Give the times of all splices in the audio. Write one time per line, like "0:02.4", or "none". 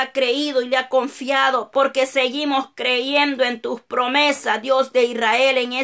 0:01.7